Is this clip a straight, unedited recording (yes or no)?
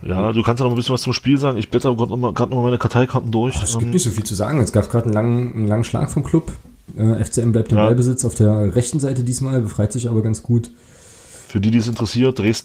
yes